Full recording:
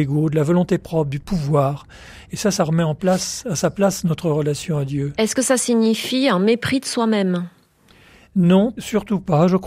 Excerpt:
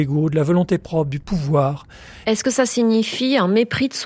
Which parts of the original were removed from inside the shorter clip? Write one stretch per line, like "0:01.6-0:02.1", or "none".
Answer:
0:02.2-0:05.1